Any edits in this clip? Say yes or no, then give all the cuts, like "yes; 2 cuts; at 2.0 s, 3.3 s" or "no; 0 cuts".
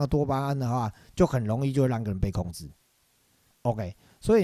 yes; 1 cut; at 3.5 s